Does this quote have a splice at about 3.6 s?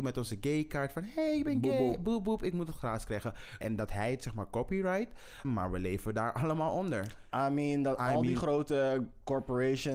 yes; 2 cuts; at 3.6 s, 5.4 s

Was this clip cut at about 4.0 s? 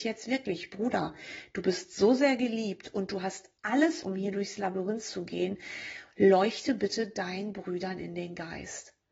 yes; 1 cut; at 4.0 s

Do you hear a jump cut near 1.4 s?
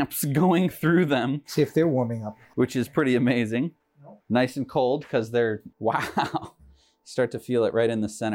no; 2 cuts; at 4.2 s, 5.7 s

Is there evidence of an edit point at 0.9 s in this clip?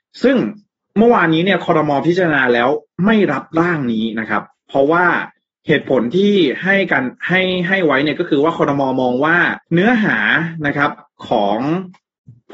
no; 1 cut; at 9.6 s

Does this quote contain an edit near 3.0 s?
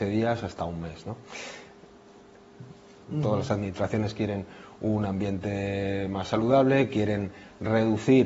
yes; 1 cut; at 3.0 s

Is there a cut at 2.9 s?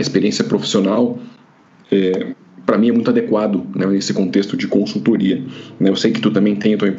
no; 0 cuts

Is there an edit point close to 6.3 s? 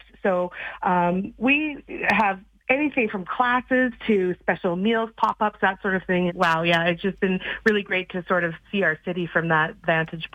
yes; 1 cut; at 6.3 s

